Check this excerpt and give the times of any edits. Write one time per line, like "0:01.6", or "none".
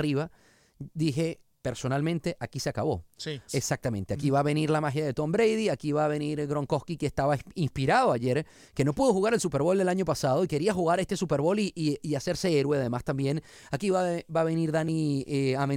0:03.5